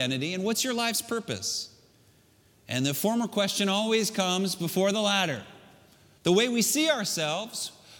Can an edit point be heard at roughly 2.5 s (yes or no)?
no